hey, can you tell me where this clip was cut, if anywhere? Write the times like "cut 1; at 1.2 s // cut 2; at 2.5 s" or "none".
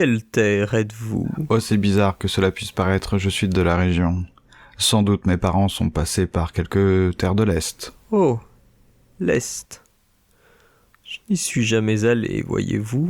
none